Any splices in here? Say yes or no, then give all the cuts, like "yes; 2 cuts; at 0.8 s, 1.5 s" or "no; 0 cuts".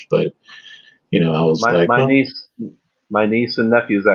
yes; 1 cut; at 1.6 s